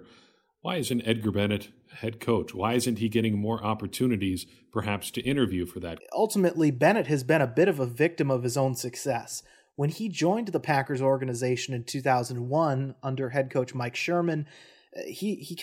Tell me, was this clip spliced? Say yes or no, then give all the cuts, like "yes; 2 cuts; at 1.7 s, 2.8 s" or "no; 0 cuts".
yes; 1 cut; at 6.0 s